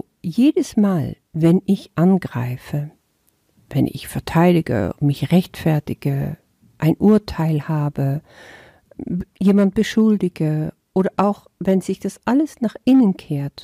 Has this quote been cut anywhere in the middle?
no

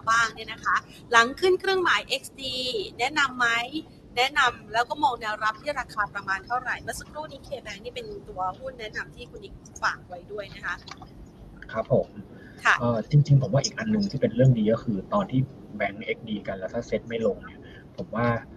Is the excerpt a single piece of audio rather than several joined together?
no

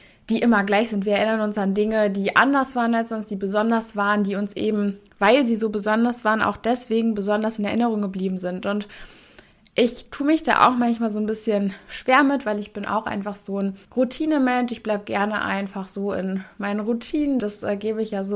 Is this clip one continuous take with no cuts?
no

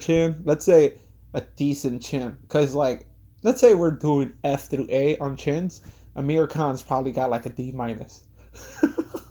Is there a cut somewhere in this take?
no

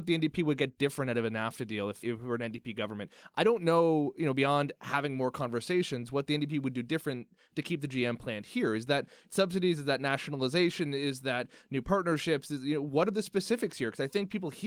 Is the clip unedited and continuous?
yes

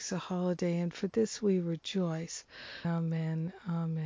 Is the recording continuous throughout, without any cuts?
no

